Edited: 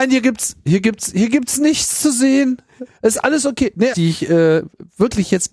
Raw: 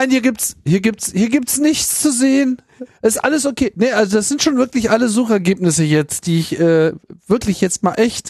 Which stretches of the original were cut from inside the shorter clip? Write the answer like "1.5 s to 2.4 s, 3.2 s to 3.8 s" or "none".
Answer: 3.9 s to 6.2 s